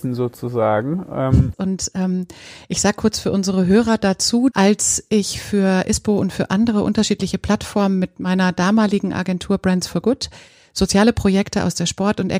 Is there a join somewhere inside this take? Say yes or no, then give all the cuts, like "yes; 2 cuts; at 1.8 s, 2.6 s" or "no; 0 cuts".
yes; 2 cuts; at 1.5 s, 4.5 s